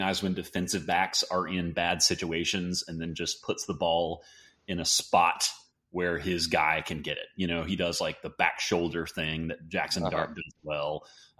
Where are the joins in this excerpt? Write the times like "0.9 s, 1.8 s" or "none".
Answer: none